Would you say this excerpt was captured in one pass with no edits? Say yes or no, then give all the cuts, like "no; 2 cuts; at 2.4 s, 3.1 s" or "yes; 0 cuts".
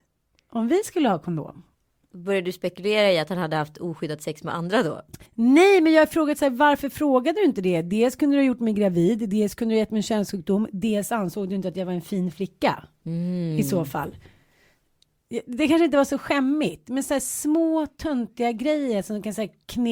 no; 1 cut; at 5.3 s